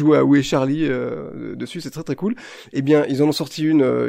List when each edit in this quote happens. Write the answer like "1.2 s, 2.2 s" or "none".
none